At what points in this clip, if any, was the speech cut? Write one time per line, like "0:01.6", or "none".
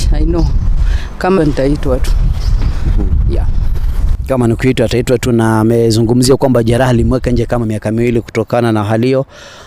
0:01.4